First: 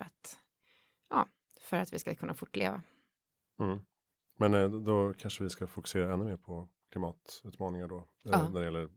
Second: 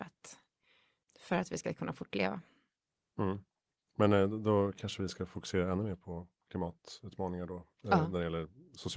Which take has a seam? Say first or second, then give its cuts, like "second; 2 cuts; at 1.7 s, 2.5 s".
second; 1 cut; at 1.0 s